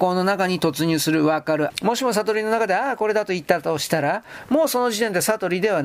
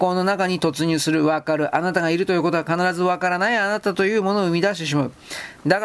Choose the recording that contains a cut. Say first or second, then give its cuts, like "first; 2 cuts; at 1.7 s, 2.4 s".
first; 1 cut; at 1.7 s